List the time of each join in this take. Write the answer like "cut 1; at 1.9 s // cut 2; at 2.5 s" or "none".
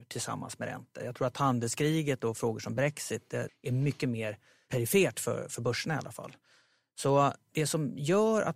cut 1; at 3.5 s

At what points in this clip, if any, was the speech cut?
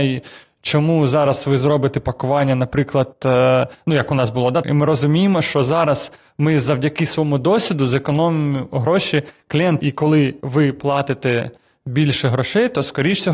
cut 1; at 4.6 s // cut 2; at 9.8 s

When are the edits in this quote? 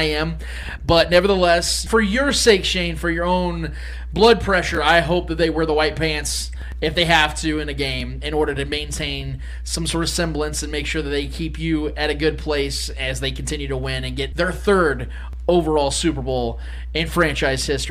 cut 1; at 1.9 s // cut 2; at 14.3 s

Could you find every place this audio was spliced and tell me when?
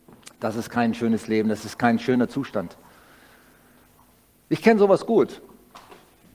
none

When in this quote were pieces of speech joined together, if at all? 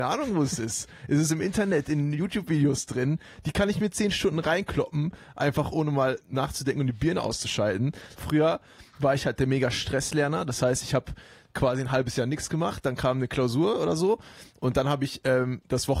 cut 1; at 8.2 s

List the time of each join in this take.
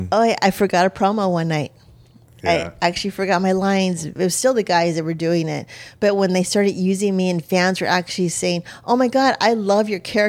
cut 1; at 4.2 s

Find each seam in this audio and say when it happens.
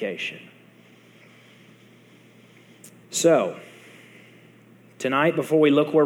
none

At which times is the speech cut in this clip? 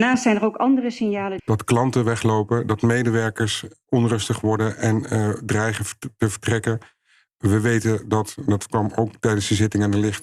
cut 1; at 1.4 s

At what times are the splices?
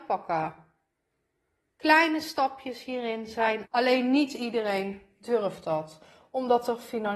cut 1; at 3.6 s

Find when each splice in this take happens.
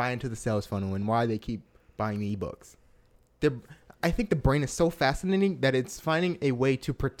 none

